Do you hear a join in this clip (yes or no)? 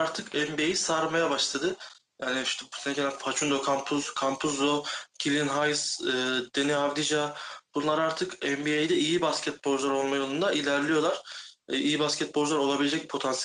no